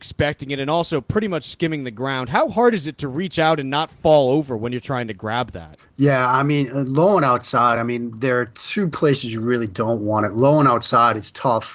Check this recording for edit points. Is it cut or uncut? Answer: uncut